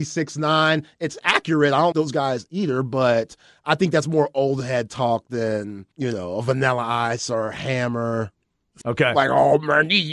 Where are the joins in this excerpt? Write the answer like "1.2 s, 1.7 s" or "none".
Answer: 1.9 s, 5.9 s, 8.8 s